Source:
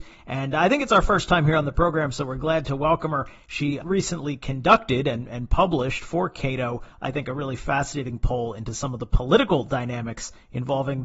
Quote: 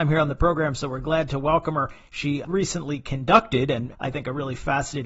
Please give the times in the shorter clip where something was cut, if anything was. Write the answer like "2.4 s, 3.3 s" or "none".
3.9 s